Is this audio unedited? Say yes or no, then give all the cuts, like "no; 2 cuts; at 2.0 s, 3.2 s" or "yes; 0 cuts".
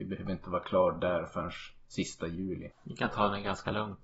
no; 1 cut; at 2.7 s